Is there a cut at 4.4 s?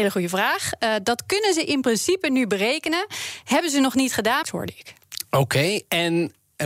yes; 1 cut; at 4.4 s

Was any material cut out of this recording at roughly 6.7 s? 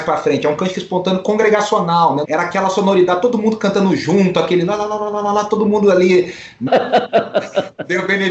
yes; 2 cuts; at 2.2 s, 6.7 s

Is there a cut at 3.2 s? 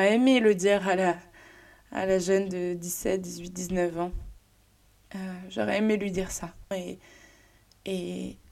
no; 1 cut; at 6.7 s

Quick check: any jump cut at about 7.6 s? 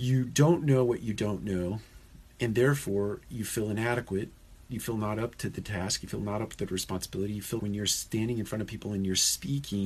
yes; 1 cut; at 7.6 s

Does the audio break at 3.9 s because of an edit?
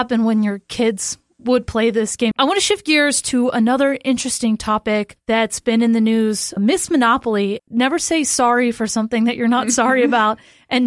no; 2 cuts; at 2.3 s, 7.6 s

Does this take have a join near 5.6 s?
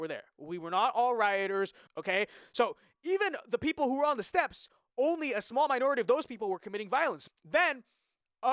no; 2 cuts; at 1.9 s, 7.3 s

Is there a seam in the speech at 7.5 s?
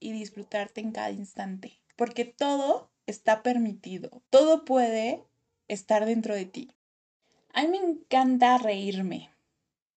no; 1 cut; at 4.3 s

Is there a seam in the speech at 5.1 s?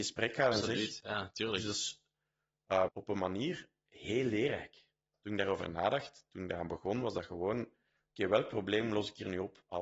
yes; 2 cuts; at 2.9 s, 5.1 s

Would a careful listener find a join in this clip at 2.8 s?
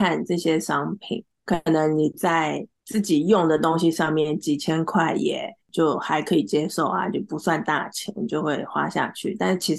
no; 1 cut; at 1.4 s

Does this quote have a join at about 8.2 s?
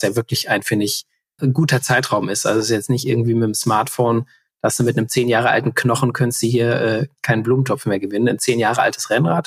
no; 1 cut; at 1.4 s

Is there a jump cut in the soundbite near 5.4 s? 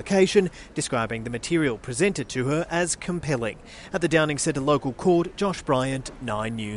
no; 0 cuts

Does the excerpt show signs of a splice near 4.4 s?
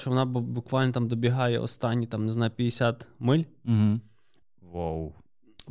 yes; 1 cut; at 4.4 s

